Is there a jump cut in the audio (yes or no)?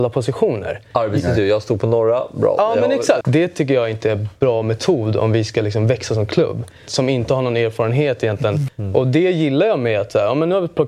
yes